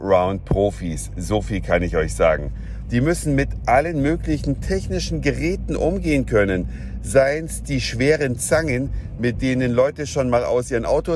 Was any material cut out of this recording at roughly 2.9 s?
no; 0 cuts

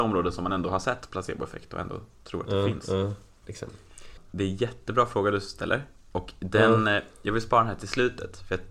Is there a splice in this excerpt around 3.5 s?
yes; 1 cut; at 3.5 s

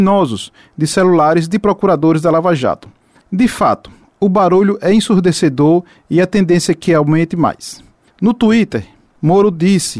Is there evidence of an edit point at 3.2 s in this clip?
yes; 2 cuts; at 3.2 s, 8.1 s

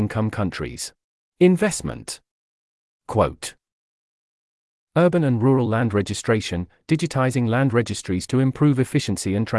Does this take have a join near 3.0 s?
no; 1 cut; at 1.3 s

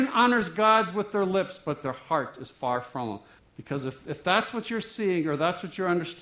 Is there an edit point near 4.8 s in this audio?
no; 1 cut; at 3.4 s

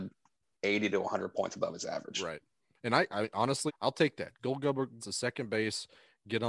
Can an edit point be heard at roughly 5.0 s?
yes; 2 cuts; at 3.7 s, 5.0 s

